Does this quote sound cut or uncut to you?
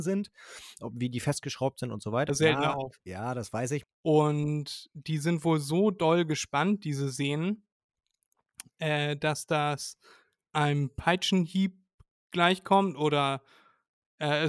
cut